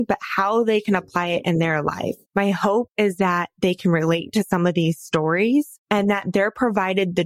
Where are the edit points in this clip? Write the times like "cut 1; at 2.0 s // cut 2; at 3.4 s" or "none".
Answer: cut 1; at 2.2 s // cut 2; at 5.8 s